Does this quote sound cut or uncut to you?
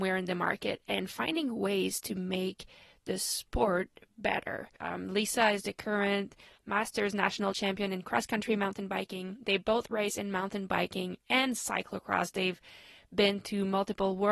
cut